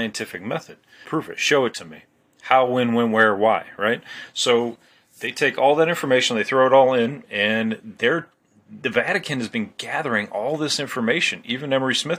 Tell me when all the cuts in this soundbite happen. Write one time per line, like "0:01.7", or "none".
0:01.0

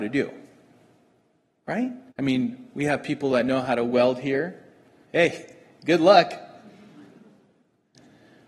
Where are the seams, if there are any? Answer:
0:02.1
0:05.0

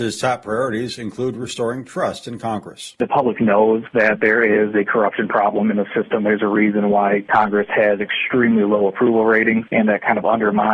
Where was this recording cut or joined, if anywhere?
none

